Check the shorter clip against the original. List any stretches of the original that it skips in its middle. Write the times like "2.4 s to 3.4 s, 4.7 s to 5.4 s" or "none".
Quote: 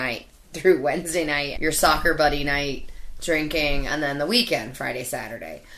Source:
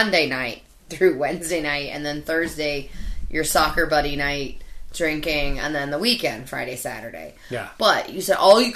1.9 s to 3.3 s